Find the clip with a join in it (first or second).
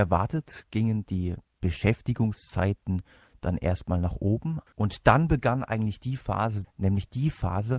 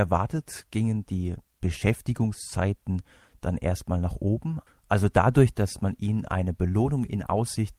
first